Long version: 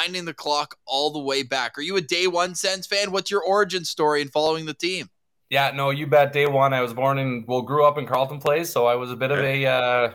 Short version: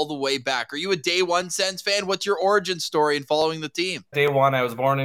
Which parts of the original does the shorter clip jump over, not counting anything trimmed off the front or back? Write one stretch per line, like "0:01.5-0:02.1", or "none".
0:05.2-0:06.3